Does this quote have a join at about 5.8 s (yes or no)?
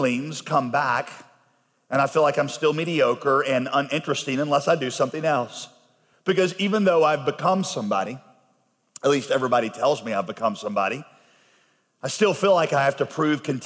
no